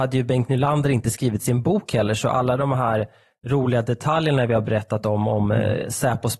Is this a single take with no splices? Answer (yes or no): yes